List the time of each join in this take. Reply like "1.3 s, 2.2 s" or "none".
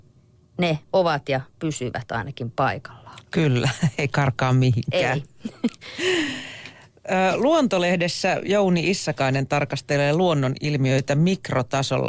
none